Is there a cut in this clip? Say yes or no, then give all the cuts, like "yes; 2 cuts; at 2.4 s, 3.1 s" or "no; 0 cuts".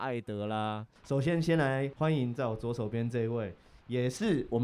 yes; 1 cut; at 1.0 s